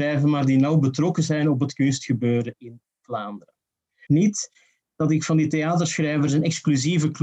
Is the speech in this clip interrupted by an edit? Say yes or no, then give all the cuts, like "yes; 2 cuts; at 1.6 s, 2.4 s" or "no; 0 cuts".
yes; 1 cut; at 4.1 s